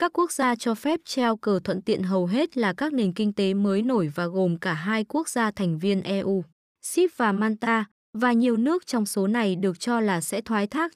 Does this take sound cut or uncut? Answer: uncut